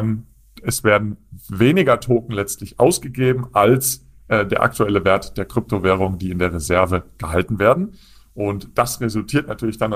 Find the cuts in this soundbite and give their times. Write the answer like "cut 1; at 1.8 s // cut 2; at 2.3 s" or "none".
none

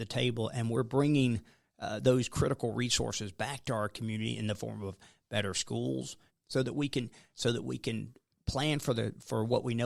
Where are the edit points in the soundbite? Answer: cut 1; at 6.3 s

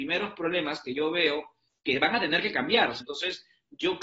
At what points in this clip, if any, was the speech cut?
cut 1; at 3.0 s

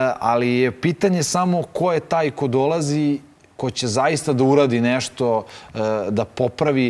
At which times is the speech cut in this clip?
none

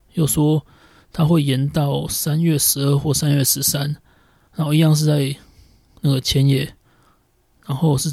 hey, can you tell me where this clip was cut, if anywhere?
none

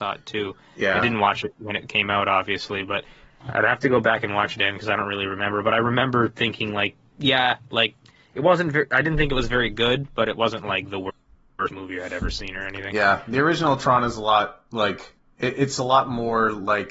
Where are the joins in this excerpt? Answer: cut 1; at 7.1 s

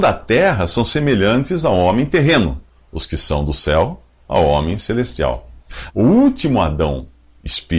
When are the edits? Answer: cut 1; at 5.9 s

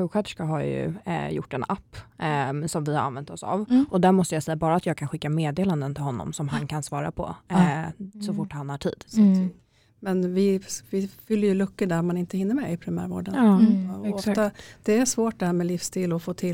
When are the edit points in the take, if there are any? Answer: cut 1; at 9.1 s

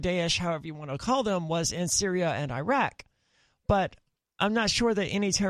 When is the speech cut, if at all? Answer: none

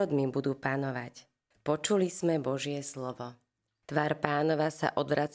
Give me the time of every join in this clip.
cut 1; at 1.5 s // cut 2; at 3.8 s

